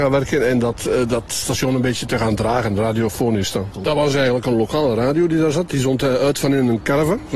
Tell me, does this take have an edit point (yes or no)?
yes